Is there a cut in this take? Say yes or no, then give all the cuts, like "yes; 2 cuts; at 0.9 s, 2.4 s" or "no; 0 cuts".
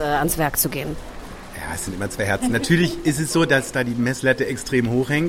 no; 0 cuts